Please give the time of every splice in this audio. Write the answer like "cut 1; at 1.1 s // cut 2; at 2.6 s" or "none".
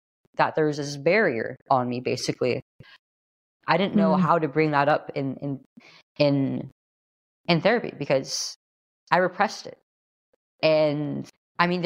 cut 1; at 3.6 s